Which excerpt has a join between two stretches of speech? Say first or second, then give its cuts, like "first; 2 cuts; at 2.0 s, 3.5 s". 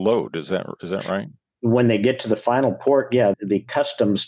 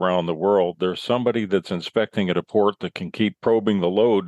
first; 1 cut; at 3.3 s